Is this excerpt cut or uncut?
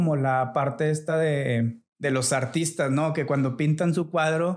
uncut